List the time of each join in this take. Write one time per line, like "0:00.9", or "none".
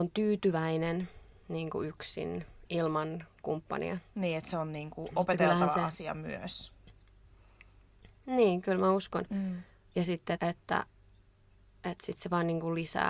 0:10.4